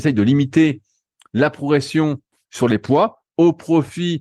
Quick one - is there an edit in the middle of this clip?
yes; 1 cut; at 2.5 s

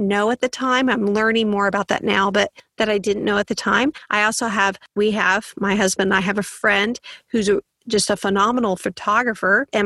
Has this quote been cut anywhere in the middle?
no; 0 cuts

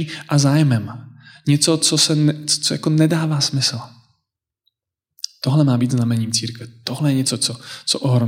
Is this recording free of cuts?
yes; 0 cuts

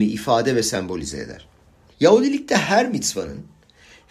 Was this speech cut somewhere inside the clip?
yes; 1 cut; at 1.9 s

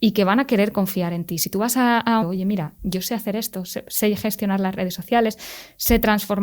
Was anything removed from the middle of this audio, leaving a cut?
yes; 1 cut; at 2.2 s

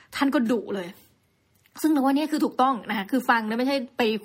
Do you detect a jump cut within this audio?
no; 0 cuts

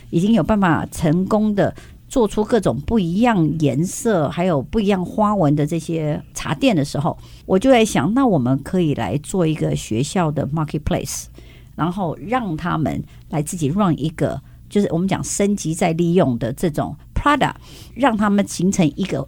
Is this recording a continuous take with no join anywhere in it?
yes; 0 cuts

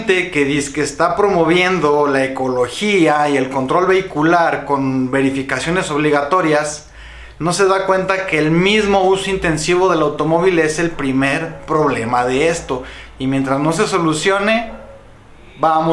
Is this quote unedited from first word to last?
yes; 0 cuts

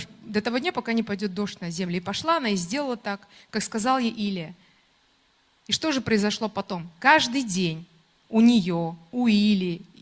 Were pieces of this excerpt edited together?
no; 0 cuts

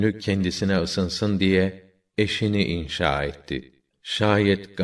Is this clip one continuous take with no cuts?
no; 1 cut; at 3.9 s

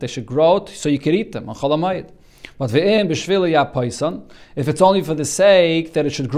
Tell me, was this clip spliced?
no; 0 cuts

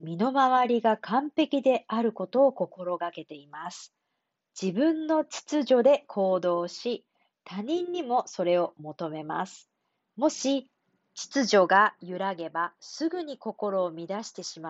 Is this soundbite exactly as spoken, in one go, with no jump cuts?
yes; 0 cuts

